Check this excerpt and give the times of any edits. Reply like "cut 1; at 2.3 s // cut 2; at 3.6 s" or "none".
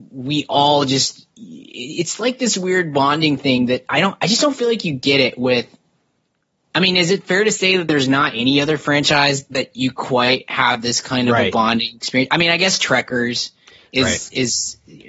none